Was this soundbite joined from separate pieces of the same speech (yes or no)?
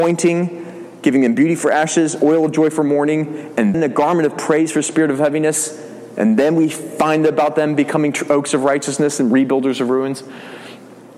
yes